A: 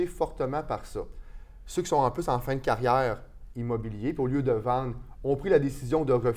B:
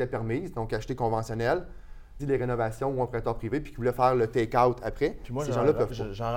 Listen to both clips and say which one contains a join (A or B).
B